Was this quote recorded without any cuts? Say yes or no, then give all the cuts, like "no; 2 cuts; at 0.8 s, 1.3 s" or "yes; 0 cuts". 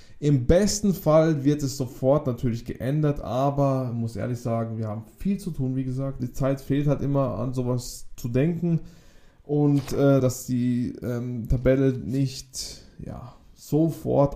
no; 2 cuts; at 6.2 s, 10.2 s